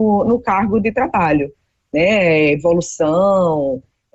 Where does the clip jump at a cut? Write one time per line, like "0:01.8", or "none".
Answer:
none